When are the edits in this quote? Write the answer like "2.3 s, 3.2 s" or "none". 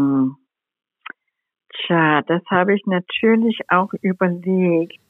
none